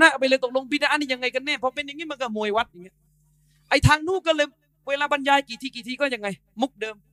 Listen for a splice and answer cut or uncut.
uncut